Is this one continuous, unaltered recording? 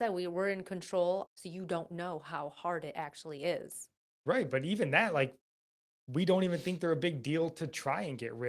no; 1 cut; at 1.3 s

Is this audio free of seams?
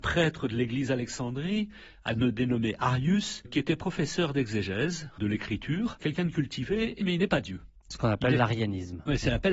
no; 2 cuts; at 6.0 s, 7.0 s

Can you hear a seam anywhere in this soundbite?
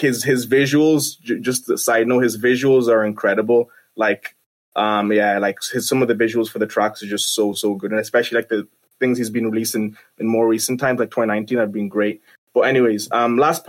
no; 0 cuts

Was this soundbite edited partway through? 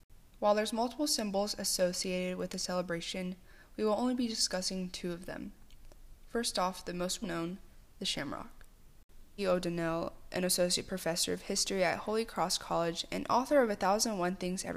yes; 2 cuts; at 7.2 s, 9.4 s

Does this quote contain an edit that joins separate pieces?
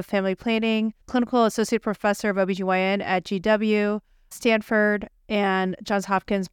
yes; 1 cut; at 1.0 s

